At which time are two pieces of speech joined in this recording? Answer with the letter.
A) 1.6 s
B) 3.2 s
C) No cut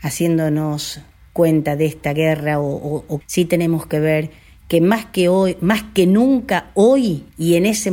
B